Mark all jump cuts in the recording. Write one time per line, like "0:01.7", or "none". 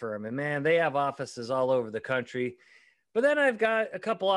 none